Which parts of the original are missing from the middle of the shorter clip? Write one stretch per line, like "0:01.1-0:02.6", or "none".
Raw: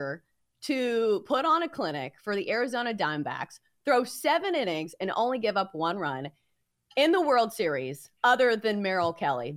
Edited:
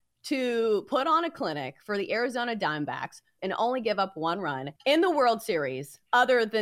0:03.8-0:05.0
0:06.3-0:06.9